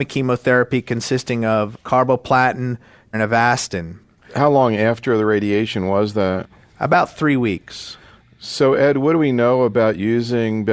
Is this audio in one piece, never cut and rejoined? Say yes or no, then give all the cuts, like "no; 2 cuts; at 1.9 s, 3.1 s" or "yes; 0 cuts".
no; 1 cut; at 3.1 s